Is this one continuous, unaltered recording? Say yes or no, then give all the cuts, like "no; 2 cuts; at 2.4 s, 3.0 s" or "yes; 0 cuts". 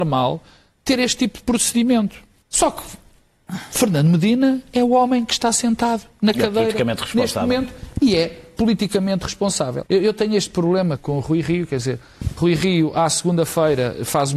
no; 3 cuts; at 2.4 s, 9.9 s, 11.0 s